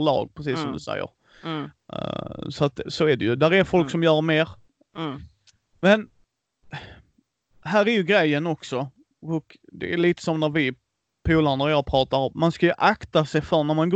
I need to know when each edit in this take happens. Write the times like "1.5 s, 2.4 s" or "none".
none